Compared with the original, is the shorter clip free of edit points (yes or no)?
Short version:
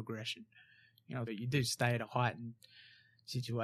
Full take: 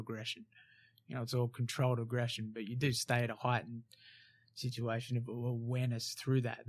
no